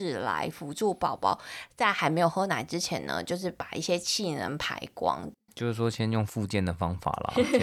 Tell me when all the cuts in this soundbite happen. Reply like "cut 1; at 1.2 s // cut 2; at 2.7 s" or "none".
none

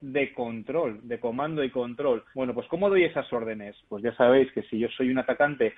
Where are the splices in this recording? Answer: cut 1; at 2.3 s // cut 2; at 3.8 s

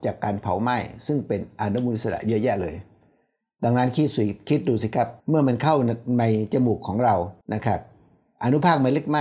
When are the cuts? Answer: cut 1; at 5.2 s // cut 2; at 7.4 s

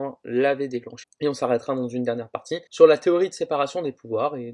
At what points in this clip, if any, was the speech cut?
cut 1; at 1.0 s // cut 2; at 2.7 s

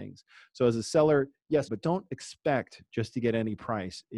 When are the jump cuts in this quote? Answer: cut 1; at 1.7 s

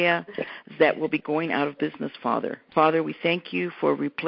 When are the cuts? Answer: cut 1; at 2.7 s

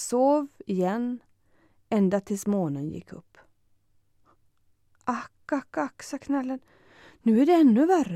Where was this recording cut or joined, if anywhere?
none

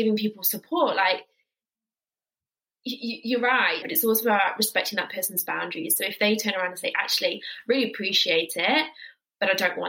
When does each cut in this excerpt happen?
cut 1; at 3.8 s

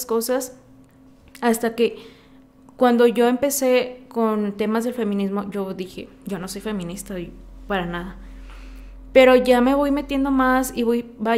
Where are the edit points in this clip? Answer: none

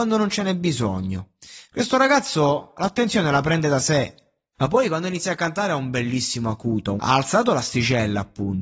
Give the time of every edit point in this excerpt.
cut 1; at 4.5 s // cut 2; at 7.0 s

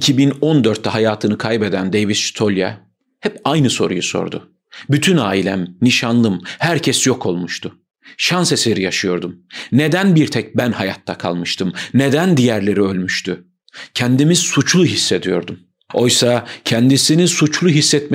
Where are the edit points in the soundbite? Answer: none

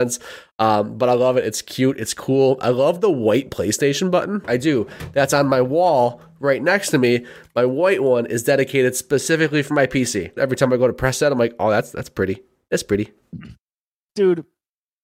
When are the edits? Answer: cut 1; at 4.4 s // cut 2; at 10.4 s

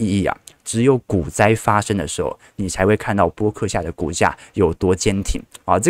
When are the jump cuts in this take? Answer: none

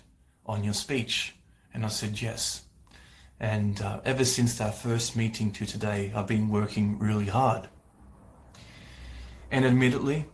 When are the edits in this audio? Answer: none

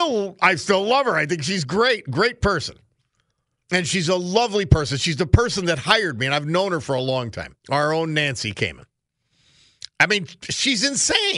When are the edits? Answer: cut 1; at 3.6 s // cut 2; at 7.6 s

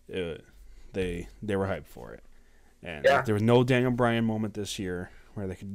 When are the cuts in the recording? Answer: none

